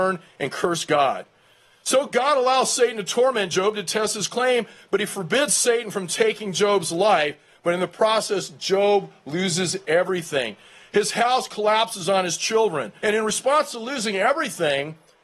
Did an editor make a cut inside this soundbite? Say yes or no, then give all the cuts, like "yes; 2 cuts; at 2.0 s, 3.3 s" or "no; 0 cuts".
yes; 1 cut; at 13.0 s